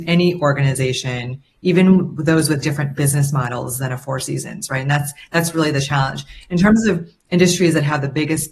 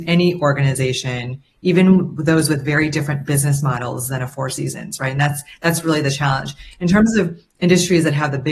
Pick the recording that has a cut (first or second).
first